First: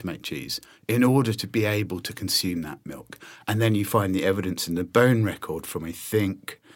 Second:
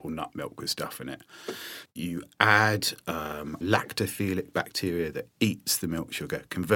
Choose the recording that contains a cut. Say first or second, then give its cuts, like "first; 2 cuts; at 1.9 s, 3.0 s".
second; 2 cuts; at 1.9 s, 3.6 s